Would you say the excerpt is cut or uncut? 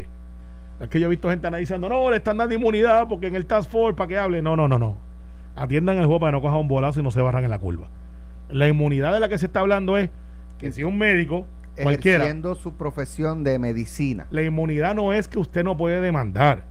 cut